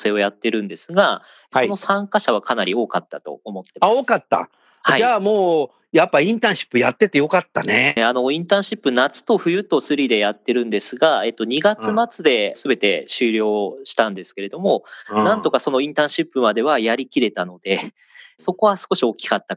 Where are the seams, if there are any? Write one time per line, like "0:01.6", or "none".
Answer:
0:08.0